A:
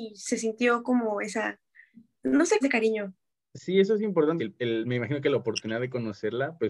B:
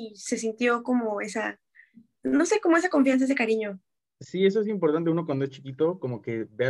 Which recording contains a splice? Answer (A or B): A